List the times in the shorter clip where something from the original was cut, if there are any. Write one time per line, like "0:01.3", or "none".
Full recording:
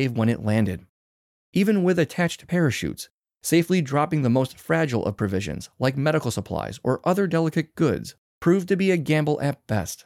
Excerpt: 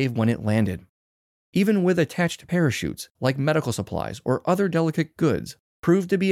0:03.1